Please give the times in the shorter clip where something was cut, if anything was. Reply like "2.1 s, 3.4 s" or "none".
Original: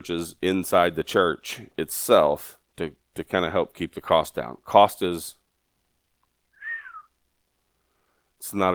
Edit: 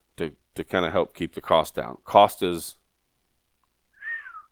none